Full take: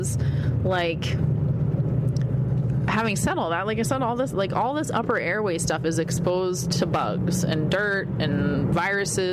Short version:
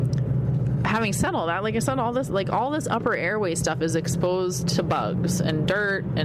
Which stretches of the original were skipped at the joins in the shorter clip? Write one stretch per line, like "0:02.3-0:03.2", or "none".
none